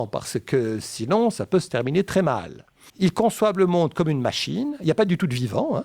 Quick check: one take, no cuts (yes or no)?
no